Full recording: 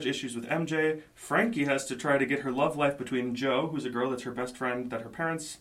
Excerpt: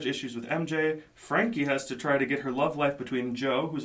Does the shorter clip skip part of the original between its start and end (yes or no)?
no